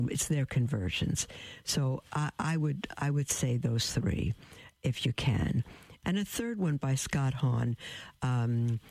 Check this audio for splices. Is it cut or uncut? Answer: cut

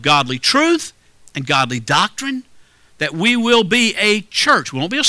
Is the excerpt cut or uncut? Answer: uncut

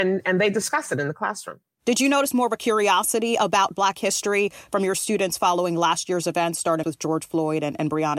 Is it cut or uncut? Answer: cut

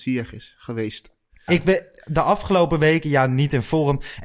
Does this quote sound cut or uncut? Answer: cut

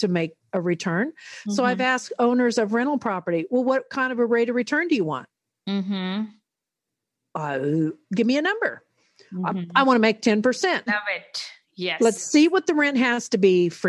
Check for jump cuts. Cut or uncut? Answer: cut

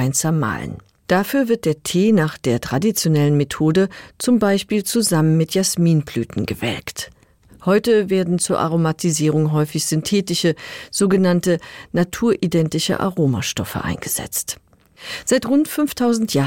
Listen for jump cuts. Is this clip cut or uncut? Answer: cut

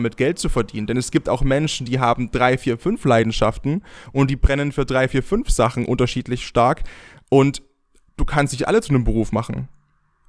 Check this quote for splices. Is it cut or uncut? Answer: uncut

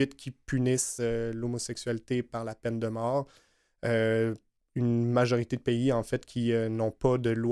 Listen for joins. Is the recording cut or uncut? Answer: uncut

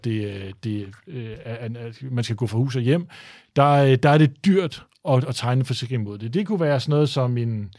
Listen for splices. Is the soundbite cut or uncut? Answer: uncut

